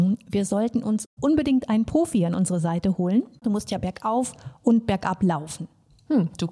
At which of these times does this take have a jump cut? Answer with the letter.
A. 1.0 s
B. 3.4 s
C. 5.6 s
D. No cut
B